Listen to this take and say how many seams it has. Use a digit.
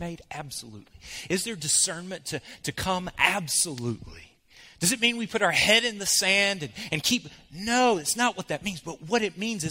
0